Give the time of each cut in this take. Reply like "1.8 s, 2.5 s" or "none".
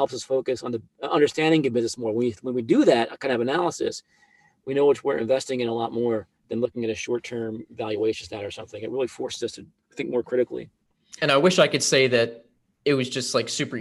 6.4 s